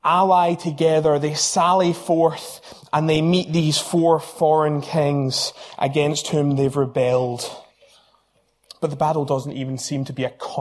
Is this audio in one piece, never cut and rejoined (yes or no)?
yes